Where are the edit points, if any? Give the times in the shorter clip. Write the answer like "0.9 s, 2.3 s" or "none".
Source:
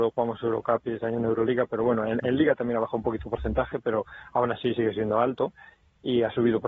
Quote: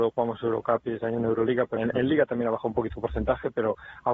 1.8 s